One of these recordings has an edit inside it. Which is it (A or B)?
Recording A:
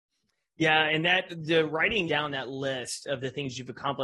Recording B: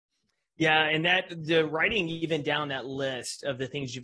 A